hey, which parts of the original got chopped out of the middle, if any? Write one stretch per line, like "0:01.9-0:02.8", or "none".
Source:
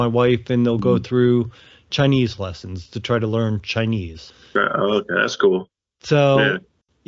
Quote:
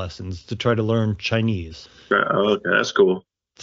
none